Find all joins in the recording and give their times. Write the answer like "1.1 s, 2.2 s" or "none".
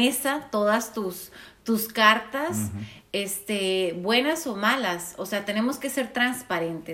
none